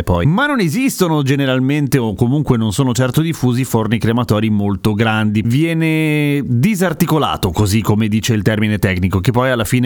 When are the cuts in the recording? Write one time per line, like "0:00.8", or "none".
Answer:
0:05.4

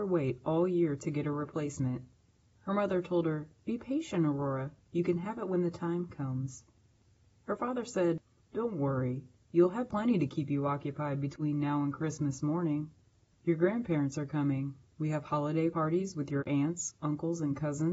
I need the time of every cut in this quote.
none

